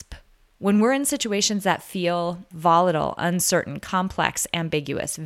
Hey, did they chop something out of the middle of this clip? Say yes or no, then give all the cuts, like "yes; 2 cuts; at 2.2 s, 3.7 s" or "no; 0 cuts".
yes; 1 cut; at 2.5 s